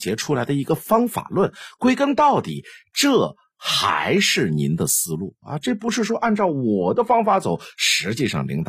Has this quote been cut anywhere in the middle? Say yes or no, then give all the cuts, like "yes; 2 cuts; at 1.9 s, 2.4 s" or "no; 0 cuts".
no; 0 cuts